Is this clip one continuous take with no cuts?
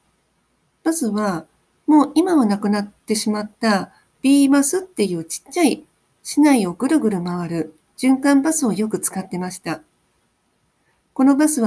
yes; 0 cuts

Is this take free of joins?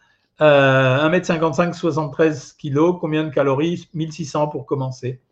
yes; 0 cuts

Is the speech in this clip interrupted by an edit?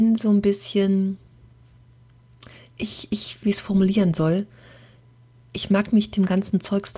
yes; 1 cut; at 3.4 s

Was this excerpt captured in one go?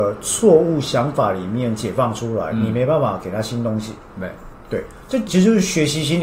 no; 1 cut; at 5.3 s

